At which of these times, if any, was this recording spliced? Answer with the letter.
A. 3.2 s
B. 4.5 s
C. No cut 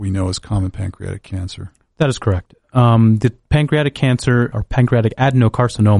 B